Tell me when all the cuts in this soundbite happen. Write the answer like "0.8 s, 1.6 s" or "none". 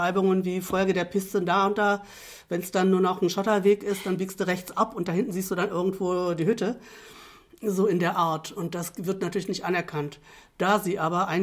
none